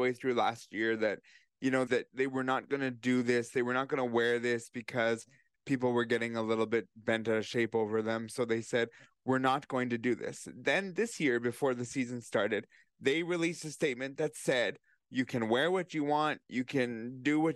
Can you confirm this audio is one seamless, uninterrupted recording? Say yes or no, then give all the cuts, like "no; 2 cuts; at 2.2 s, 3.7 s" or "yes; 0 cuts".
no; 1 cut; at 1.9 s